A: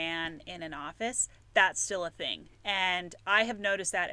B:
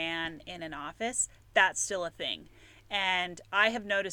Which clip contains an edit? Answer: A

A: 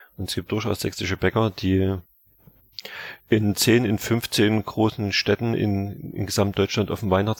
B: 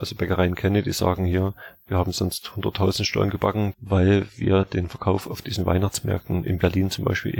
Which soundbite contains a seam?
B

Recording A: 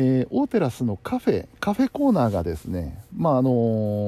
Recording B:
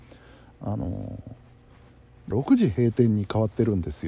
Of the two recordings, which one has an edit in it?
B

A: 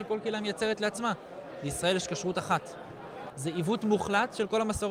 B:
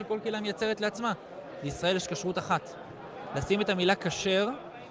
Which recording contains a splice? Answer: A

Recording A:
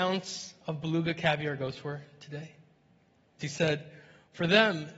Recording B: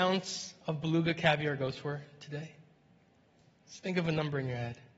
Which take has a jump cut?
A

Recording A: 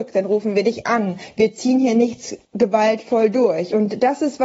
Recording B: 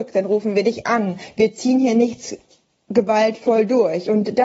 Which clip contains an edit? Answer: A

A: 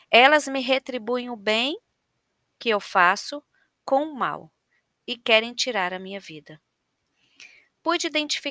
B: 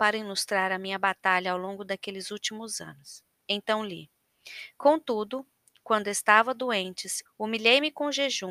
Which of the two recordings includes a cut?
B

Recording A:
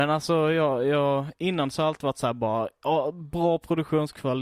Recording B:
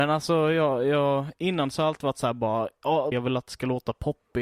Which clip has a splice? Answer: B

